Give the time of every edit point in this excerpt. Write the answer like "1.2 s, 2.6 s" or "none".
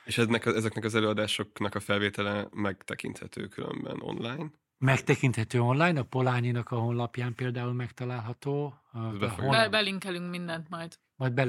none